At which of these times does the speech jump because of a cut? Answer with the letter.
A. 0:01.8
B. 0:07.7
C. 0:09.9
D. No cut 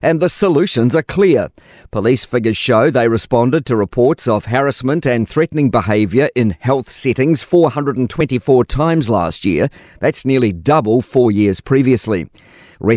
D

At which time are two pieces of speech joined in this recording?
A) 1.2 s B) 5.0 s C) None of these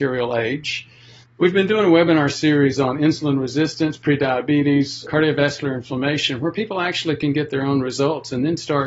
A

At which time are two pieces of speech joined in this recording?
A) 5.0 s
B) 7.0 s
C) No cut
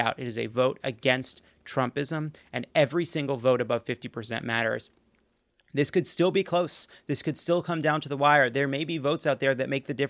C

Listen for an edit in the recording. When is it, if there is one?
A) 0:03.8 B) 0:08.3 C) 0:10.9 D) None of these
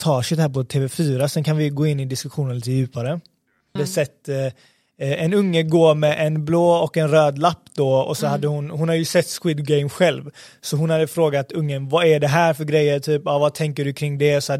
A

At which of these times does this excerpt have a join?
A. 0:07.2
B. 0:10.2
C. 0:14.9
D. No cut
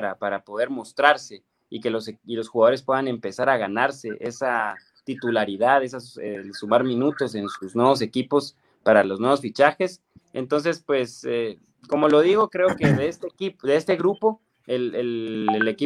B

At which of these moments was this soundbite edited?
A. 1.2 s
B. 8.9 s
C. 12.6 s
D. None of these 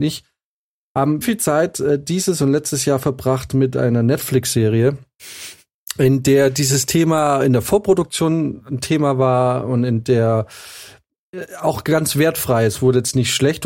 A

